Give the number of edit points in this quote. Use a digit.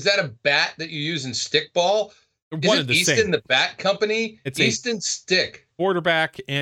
0